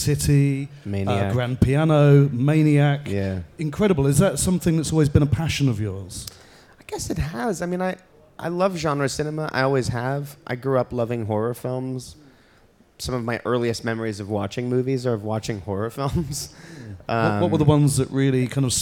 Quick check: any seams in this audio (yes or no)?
no